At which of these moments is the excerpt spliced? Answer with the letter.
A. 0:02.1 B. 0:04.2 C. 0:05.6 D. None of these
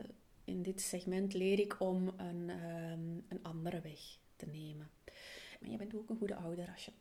C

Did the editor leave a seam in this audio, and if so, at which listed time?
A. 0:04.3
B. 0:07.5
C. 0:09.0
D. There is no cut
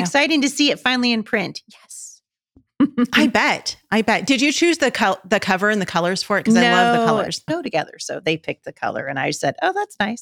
B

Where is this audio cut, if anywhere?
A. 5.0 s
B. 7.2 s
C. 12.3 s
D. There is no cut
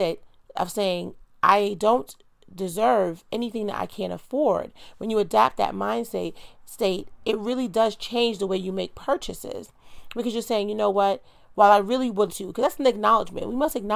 C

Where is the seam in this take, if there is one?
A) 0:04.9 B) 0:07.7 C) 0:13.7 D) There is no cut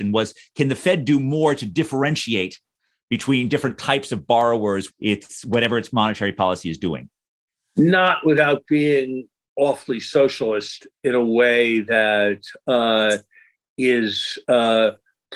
A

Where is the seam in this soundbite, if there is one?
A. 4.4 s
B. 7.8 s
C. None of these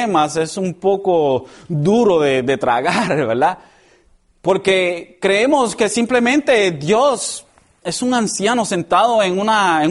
B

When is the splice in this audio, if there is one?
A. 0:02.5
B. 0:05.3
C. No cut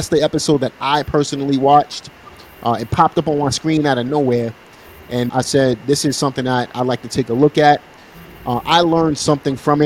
B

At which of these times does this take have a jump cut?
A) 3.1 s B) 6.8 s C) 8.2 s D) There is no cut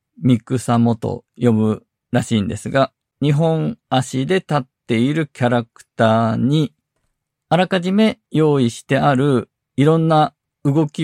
A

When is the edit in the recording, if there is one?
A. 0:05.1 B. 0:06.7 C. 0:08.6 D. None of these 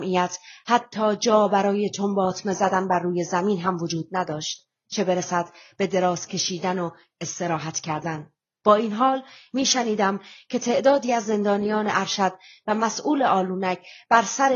C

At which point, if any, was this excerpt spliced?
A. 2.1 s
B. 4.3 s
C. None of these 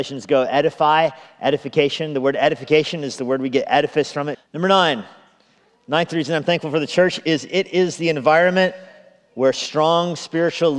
B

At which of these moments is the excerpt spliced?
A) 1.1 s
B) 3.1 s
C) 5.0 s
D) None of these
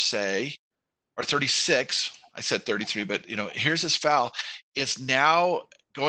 D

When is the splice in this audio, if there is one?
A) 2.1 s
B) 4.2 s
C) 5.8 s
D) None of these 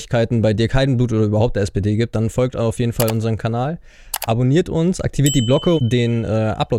C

